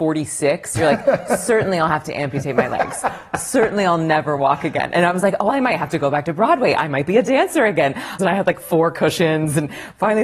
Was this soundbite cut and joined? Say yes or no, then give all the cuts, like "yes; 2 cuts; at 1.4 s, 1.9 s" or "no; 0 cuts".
yes; 1 cut; at 8.2 s